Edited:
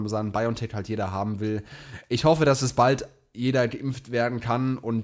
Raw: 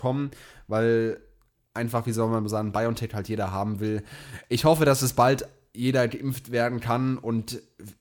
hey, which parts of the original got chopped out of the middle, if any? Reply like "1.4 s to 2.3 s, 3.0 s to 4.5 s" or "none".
none